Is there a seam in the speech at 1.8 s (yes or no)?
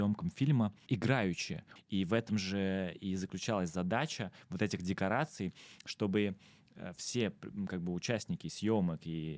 yes